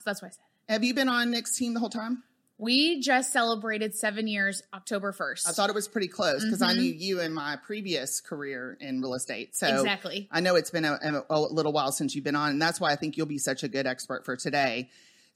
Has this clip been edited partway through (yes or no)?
no